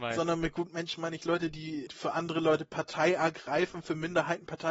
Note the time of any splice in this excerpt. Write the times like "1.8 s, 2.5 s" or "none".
1.9 s